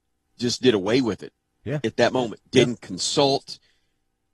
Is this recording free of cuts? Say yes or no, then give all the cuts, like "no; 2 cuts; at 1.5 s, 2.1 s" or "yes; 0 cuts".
yes; 0 cuts